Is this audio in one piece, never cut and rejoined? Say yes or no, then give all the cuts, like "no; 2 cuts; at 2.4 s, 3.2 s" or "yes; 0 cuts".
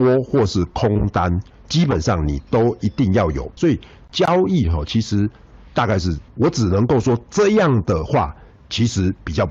no; 2 cuts; at 3.6 s, 6.3 s